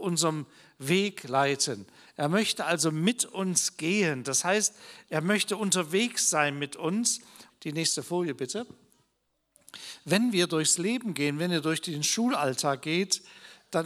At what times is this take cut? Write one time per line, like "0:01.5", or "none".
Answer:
0:07.5